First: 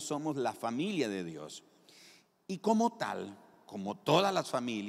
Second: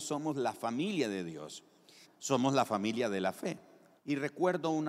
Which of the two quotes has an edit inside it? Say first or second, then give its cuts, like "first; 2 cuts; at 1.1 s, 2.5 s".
second; 2 cuts; at 2.0 s, 4.0 s